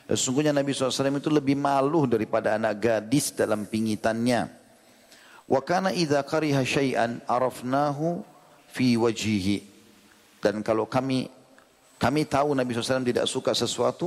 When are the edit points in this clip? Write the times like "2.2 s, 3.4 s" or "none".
none